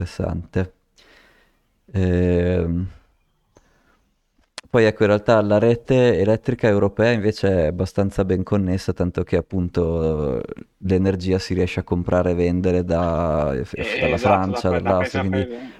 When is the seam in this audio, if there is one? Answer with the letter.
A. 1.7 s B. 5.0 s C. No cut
C